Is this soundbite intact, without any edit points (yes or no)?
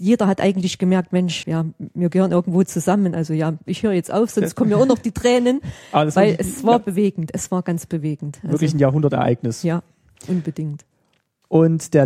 no